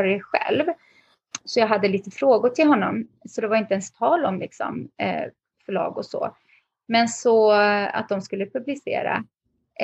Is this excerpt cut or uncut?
uncut